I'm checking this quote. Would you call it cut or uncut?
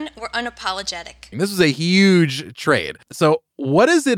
cut